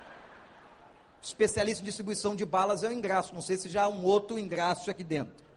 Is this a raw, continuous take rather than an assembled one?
yes; 0 cuts

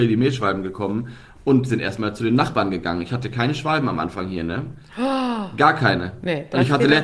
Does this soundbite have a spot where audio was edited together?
no; 0 cuts

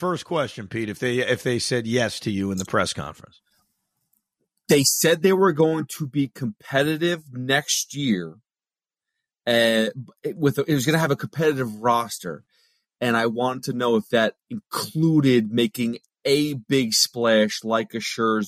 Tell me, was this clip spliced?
no; 0 cuts

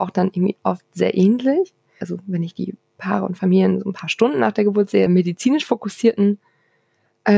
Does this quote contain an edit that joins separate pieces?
yes; 2 cuts; at 2.0 s, 5.1 s

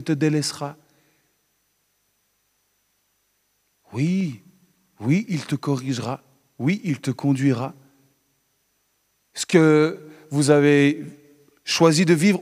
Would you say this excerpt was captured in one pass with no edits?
no; 1 cut; at 9.2 s

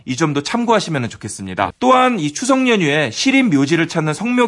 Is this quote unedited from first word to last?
no; 1 cut; at 1.7 s

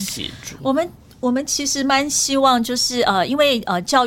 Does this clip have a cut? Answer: no; 0 cuts

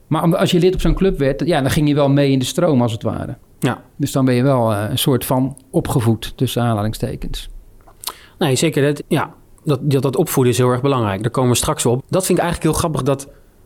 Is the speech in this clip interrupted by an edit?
yes; 2 cuts; at 9.0 s, 12.0 s

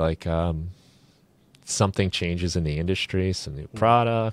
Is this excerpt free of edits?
yes; 0 cuts

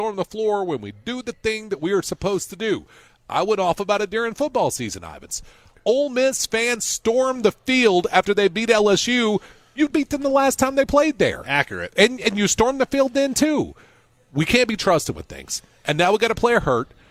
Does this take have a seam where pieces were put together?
yes; 1 cut; at 9.9 s

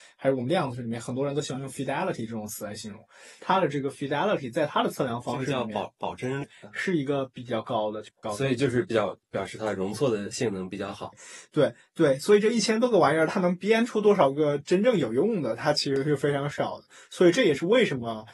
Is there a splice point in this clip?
yes; 3 cuts; at 6.4 s, 8.2 s, 11.1 s

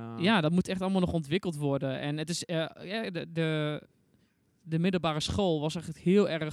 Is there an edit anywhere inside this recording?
no; 0 cuts

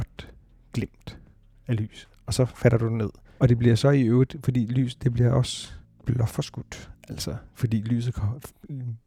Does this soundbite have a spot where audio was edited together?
yes; 1 cut; at 3.4 s

